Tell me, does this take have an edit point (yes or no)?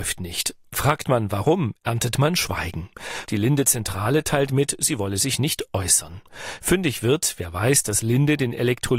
yes